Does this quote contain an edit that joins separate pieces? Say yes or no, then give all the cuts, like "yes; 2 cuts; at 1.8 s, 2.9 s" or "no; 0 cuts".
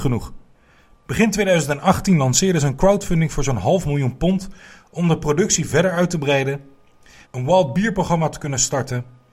yes; 1 cut; at 7.2 s